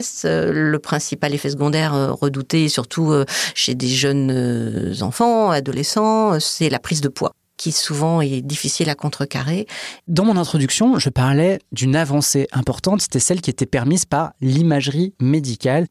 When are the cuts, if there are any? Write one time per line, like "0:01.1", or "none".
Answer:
0:10.0